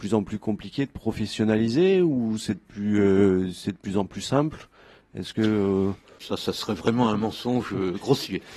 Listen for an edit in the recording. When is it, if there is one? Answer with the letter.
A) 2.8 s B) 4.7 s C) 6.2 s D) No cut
C